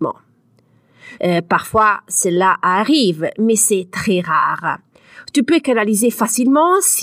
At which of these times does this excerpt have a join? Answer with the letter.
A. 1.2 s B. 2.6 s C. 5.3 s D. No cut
A